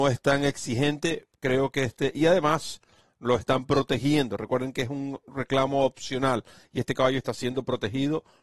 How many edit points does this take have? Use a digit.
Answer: 0